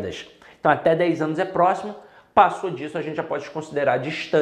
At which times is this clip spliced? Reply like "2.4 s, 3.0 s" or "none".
none